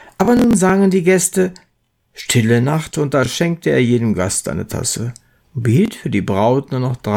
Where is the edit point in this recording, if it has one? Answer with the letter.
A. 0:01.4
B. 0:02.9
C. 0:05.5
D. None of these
B